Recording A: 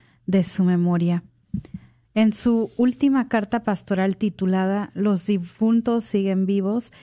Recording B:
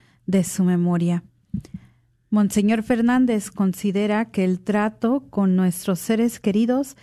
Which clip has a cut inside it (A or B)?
A